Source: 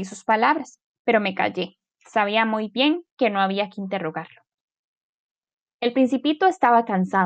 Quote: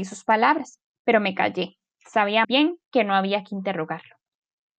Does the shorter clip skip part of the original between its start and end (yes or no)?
yes